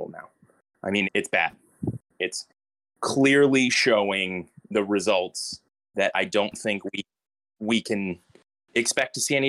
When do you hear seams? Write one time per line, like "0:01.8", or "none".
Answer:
0:01.0